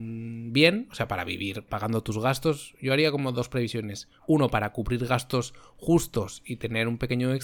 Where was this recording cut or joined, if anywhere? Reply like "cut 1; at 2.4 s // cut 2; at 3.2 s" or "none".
cut 1; at 1.7 s // cut 2; at 4.2 s